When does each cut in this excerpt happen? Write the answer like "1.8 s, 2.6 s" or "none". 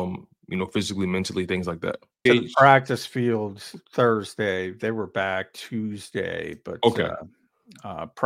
2.3 s